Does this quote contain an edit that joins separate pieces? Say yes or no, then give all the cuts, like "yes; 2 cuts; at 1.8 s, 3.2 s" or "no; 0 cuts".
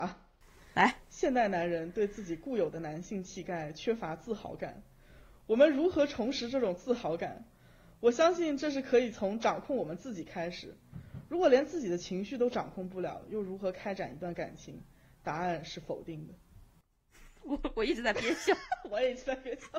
no; 0 cuts